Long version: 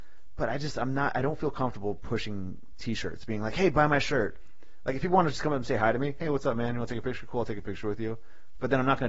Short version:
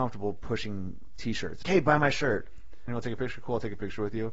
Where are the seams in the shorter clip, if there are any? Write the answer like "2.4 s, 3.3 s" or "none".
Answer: 1.6 s, 2.9 s